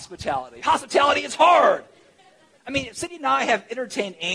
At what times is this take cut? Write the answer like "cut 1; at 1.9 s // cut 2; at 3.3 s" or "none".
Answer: cut 1; at 2.5 s